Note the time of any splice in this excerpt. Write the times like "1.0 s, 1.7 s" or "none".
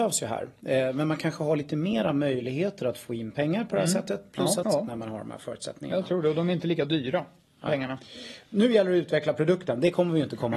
4.6 s